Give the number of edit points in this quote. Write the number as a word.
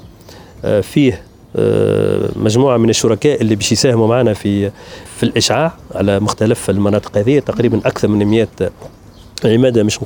one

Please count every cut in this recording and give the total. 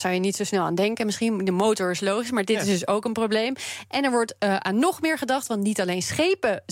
zero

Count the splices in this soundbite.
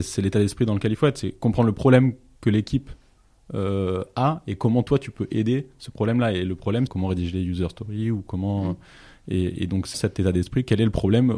two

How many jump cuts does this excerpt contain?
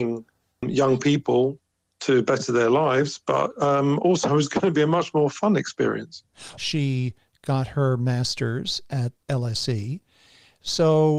two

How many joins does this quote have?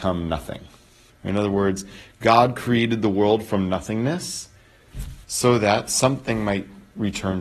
two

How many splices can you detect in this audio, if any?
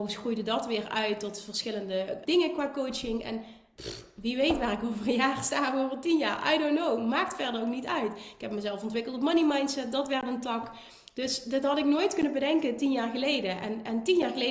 one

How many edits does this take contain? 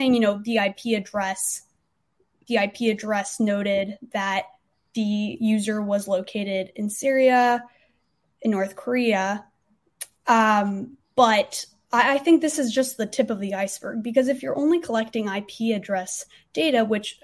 zero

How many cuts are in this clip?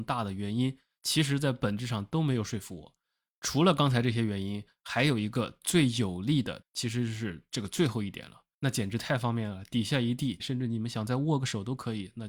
three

